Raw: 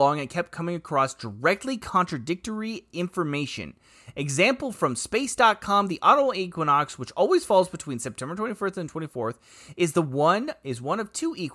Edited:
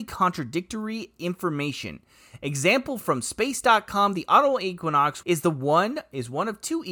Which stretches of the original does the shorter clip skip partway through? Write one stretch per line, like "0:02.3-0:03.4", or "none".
0:07.0-0:09.7

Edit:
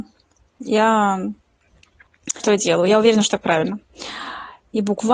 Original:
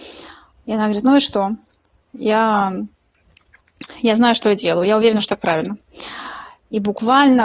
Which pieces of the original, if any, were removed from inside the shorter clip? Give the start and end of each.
0:03.9-0:04.4

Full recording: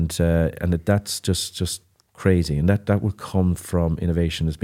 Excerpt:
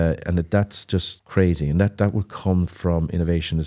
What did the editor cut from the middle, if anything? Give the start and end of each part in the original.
0:01.5-0:02.0

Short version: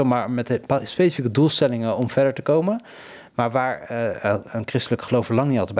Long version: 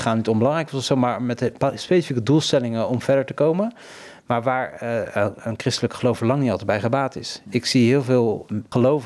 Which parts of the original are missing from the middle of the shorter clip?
none

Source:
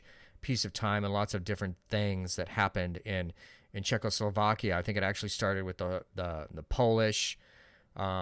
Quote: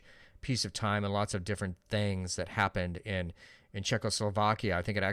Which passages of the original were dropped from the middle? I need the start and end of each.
none

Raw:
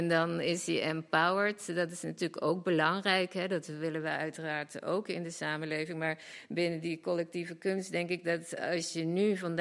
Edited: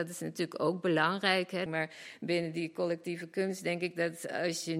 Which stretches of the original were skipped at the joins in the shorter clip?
0:03.5-0:05.9

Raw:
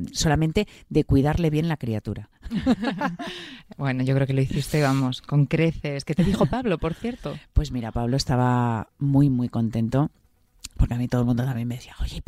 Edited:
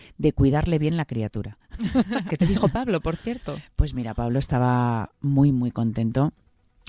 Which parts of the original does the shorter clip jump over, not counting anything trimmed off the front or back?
0:03.0-0:06.0

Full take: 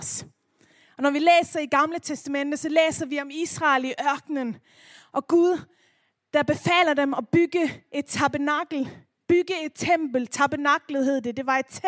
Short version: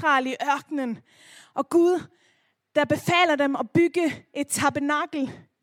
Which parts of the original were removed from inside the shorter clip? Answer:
none

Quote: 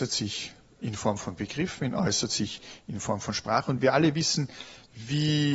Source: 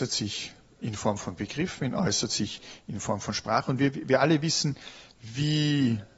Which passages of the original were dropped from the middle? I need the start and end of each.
0:03.8-0:04.0

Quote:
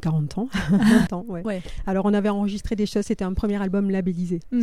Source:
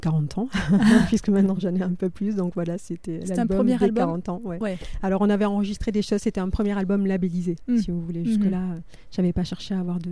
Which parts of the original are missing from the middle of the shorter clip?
0:01.1-0:04.2

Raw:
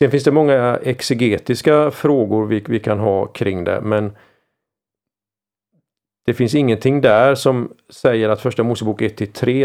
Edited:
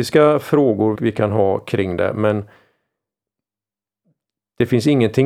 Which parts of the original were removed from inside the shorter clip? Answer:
0:02.5-0:02.6

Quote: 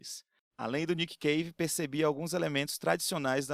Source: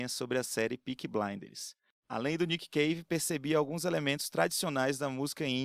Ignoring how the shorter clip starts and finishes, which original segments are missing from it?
none

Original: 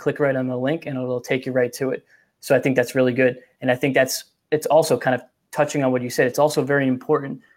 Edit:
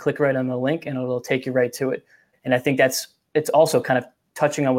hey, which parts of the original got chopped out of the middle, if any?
0:02.3-0:03.5

